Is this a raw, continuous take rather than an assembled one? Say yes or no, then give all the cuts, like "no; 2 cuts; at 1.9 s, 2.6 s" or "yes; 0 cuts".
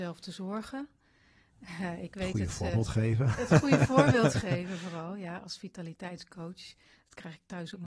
yes; 0 cuts